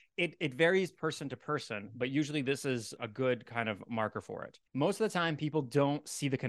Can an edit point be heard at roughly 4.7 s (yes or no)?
yes